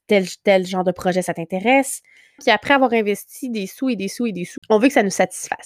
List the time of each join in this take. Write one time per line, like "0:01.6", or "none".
0:02.4
0:04.6